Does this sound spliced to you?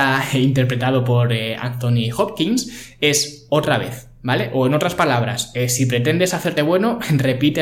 no; 0 cuts

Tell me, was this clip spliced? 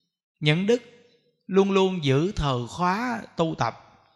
no; 0 cuts

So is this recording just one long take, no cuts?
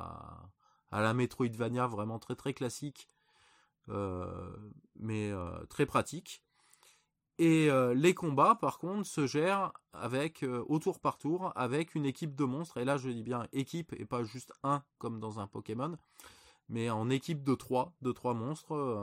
yes; 0 cuts

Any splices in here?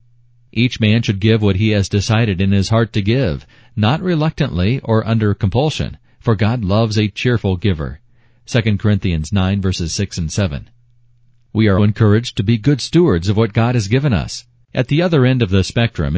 yes; 2 cuts; at 11.8 s, 14.6 s

